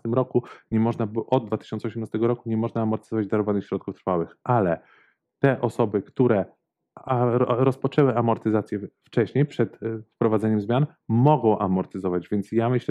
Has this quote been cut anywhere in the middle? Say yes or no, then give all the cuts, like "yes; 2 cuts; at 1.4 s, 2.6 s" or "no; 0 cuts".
no; 0 cuts